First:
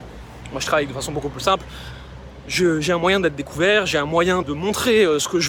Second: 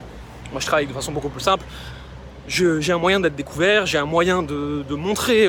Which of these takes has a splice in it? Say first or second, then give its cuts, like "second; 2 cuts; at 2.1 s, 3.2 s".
first; 1 cut; at 4.4 s